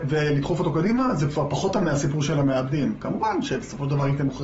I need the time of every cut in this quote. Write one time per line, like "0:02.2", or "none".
none